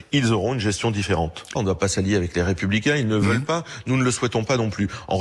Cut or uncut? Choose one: cut